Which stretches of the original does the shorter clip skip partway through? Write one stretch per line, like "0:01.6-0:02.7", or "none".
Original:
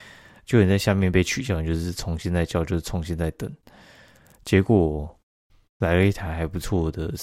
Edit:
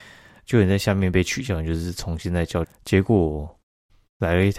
0:02.6-0:04.2